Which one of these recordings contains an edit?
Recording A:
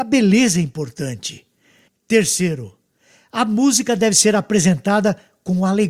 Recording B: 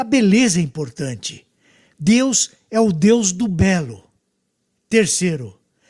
A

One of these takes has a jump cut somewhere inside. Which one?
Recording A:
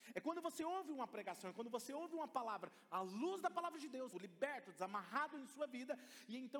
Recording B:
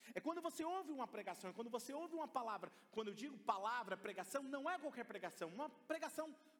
A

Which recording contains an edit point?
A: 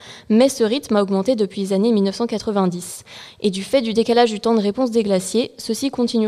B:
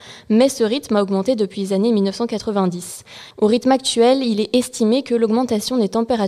B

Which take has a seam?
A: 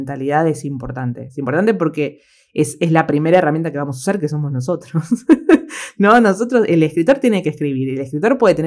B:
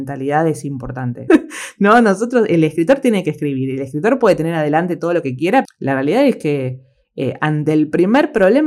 B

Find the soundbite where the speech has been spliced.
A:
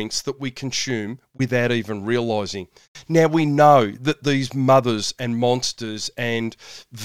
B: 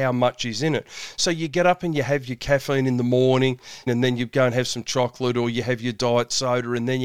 B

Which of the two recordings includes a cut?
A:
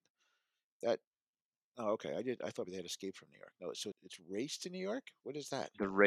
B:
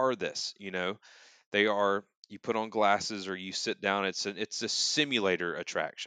A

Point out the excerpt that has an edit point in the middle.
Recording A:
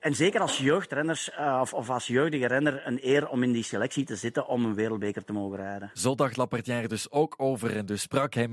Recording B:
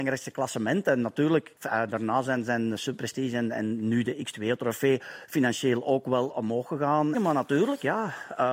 B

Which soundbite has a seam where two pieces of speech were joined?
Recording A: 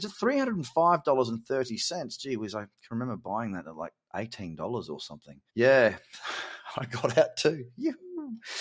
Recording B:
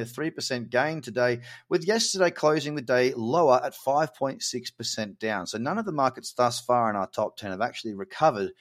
A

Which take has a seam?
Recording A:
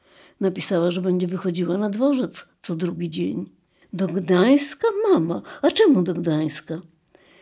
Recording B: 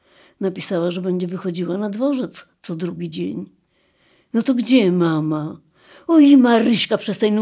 A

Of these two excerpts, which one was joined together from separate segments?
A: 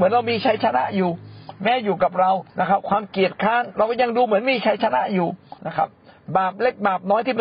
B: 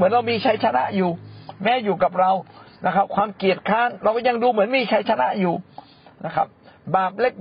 A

